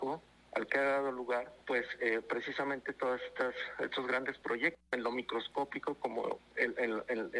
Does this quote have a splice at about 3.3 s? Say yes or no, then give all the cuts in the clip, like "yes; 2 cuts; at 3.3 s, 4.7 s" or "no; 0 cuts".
no; 3 cuts; at 1.6 s, 4.9 s, 6.4 s